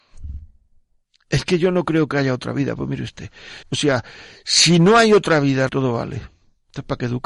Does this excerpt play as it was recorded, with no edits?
no; 2 cuts; at 3.6 s, 5.7 s

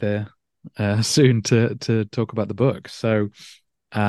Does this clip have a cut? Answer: no; 0 cuts

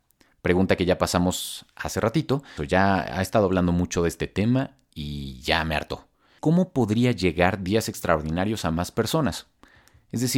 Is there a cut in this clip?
yes; 2 cuts; at 2.6 s, 6.4 s

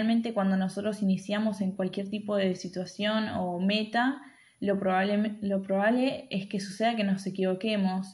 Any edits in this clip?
no; 0 cuts

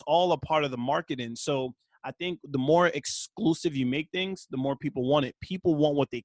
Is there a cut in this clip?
no; 0 cuts

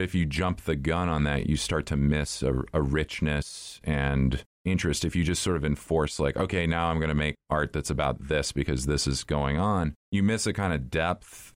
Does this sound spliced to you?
no; 0 cuts

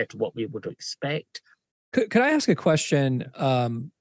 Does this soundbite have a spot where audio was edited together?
yes; 1 cut; at 1.7 s

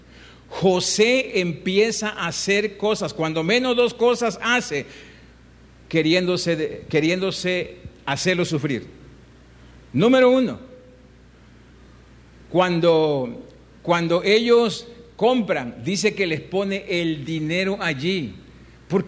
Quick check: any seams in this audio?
no; 0 cuts

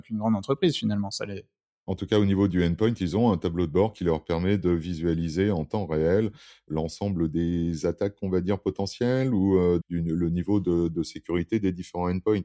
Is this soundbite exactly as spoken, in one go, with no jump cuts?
no; 1 cut; at 9.8 s

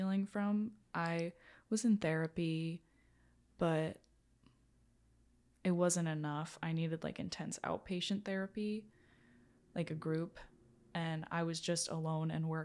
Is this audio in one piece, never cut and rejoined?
yes; 0 cuts

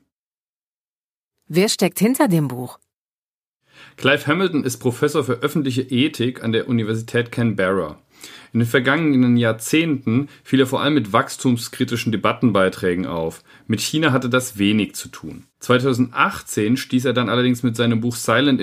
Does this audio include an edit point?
yes; 1 cut; at 15.5 s

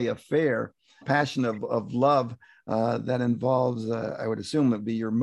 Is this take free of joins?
no; 1 cut; at 1.0 s

